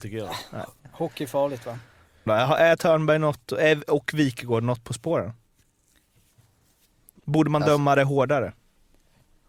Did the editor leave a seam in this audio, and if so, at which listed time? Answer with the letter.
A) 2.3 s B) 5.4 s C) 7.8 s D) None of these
A